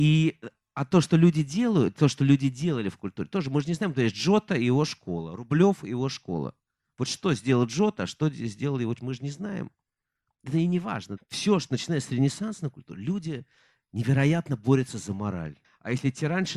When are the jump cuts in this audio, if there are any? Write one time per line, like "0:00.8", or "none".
0:11.2
0:15.6